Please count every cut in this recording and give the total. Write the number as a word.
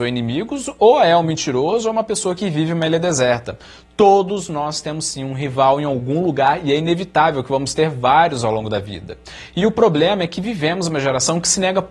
zero